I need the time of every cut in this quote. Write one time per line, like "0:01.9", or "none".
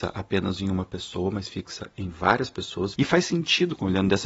0:02.9